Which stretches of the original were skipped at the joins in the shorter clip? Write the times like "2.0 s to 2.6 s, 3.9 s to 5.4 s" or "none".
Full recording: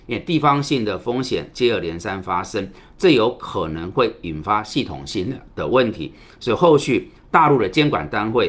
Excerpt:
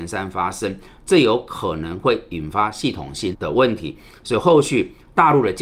5.2 s to 5.5 s